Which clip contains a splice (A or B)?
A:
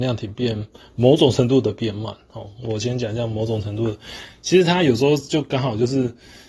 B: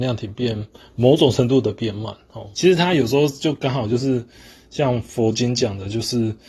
B